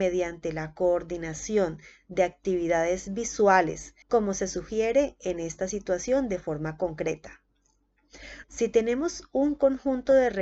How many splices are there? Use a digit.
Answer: 2